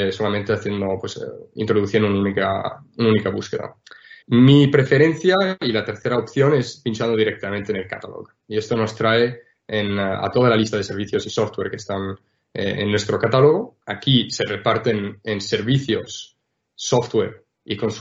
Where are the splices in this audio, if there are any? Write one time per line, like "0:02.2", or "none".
0:04.2
0:13.8